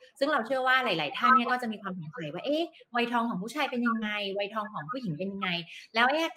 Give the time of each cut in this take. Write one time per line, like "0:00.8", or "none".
none